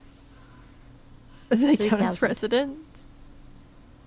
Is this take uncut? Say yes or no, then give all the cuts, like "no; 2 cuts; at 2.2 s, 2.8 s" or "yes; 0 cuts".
yes; 0 cuts